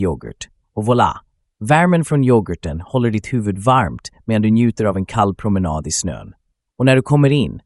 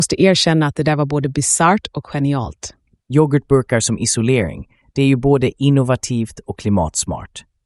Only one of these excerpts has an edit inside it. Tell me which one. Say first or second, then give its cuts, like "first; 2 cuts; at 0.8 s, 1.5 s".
second; 1 cut; at 3.0 s